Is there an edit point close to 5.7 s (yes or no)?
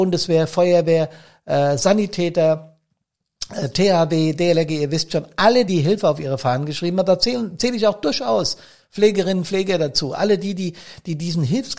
yes